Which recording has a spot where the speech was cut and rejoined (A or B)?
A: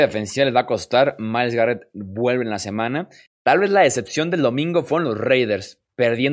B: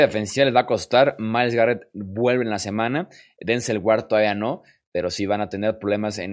A